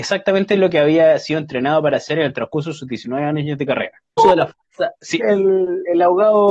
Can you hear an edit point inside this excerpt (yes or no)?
yes